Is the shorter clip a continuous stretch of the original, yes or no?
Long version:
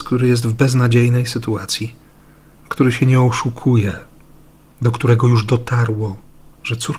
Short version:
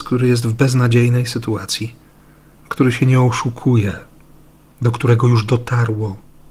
yes